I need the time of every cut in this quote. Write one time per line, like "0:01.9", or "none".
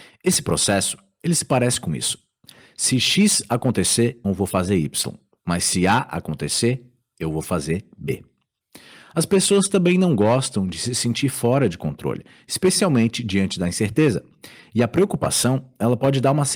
0:04.2

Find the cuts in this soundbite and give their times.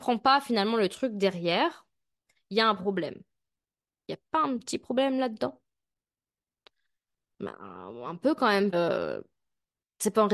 0:04.0
0:08.7

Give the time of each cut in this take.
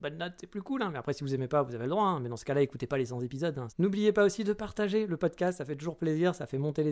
0:03.7

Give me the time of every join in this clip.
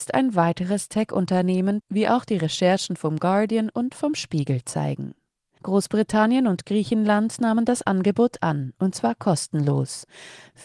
0:01.8
0:05.6

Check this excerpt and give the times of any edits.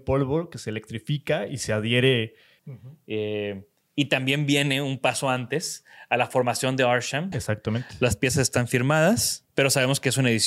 0:02.6
0:07.3
0:09.5

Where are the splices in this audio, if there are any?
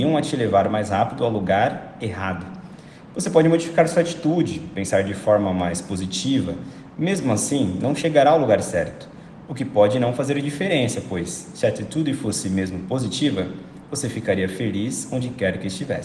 none

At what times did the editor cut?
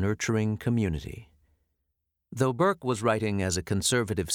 0:02.2

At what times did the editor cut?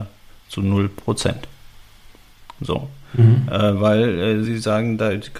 none

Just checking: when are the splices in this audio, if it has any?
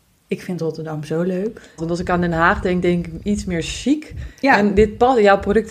0:01.8

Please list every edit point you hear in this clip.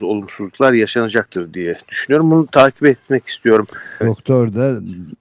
0:04.0

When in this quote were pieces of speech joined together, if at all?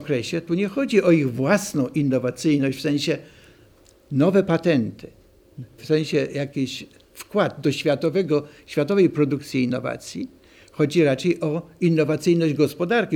0:05.8

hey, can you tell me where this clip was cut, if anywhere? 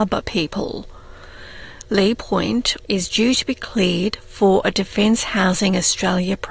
0:02.8

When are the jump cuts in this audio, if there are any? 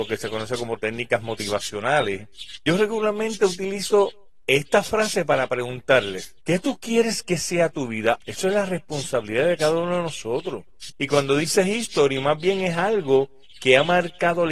0:08.2
0:10.9

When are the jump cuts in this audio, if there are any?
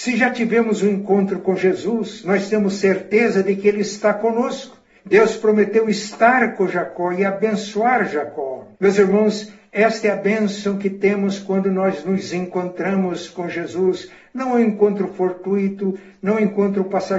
0:05.0
0:08.7

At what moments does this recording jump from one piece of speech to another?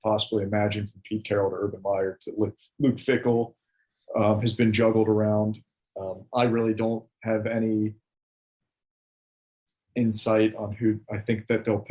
none

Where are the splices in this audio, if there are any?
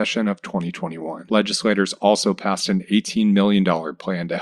none

